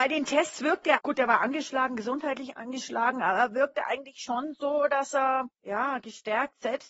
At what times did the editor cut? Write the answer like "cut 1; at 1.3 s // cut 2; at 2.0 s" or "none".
cut 1; at 1.0 s